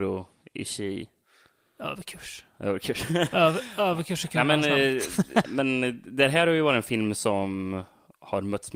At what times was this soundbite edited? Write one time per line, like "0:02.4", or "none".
0:05.4